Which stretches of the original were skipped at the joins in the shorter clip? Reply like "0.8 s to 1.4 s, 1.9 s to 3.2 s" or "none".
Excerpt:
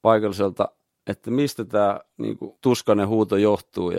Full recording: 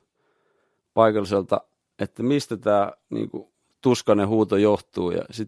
3.5 s to 3.8 s